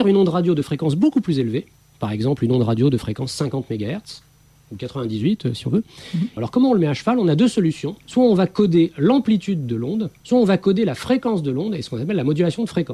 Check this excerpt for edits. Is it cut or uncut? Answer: cut